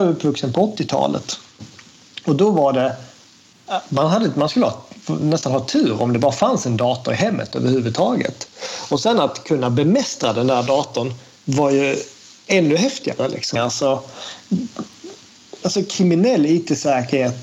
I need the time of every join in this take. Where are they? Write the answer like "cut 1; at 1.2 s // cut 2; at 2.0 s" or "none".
cut 1; at 13.6 s // cut 2; at 15.6 s